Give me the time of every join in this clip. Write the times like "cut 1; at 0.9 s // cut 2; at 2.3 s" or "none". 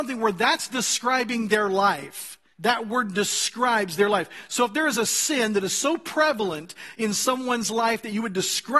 cut 1; at 2.5 s